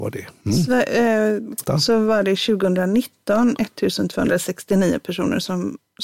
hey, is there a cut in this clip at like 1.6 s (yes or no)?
yes